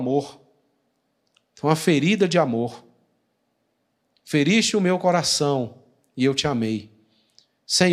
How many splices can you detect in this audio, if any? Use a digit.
0